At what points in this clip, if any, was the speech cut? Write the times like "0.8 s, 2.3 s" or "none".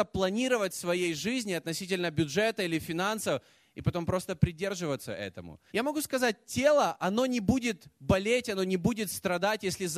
5.7 s